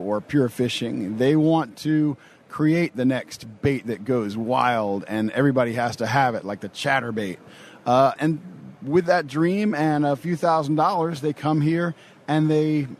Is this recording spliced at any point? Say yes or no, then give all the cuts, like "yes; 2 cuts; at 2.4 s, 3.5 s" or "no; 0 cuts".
yes; 1 cut; at 8.2 s